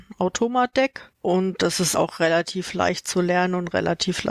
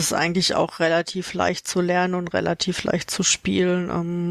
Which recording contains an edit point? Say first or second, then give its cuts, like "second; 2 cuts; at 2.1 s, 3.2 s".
first; 1 cut; at 1.9 s